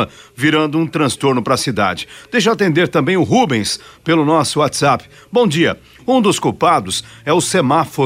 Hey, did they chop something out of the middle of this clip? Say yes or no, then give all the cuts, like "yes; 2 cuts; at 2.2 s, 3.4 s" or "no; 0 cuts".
yes; 1 cut; at 6.0 s